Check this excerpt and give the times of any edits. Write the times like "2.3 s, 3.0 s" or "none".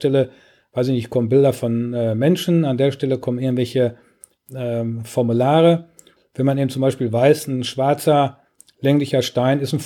6.2 s